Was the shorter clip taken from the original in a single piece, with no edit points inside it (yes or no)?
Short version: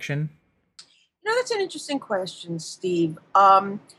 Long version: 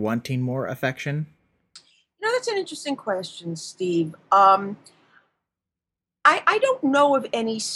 yes